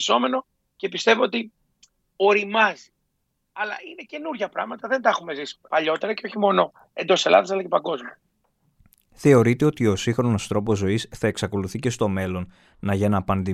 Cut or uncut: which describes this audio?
cut